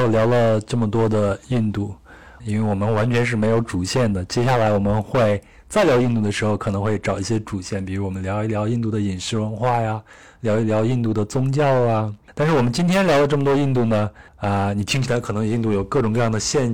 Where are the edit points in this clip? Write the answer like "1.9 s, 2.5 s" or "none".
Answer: 2.4 s, 14.3 s